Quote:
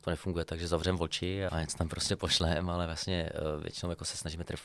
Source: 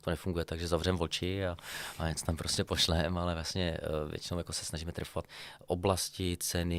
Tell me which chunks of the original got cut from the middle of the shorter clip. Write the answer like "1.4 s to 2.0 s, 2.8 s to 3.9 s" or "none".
1.5 s to 2.0 s